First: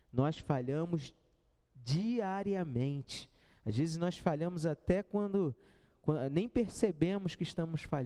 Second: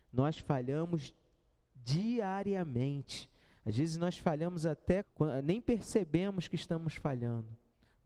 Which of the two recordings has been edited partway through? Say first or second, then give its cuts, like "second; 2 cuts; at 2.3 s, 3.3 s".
second; 1 cut; at 5.0 s